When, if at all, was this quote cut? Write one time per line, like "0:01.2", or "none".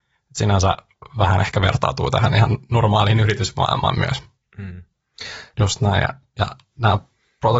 0:05.5